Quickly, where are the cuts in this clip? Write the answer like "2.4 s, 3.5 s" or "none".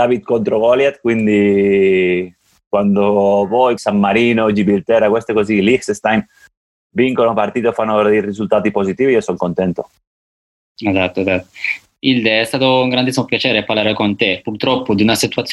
3.8 s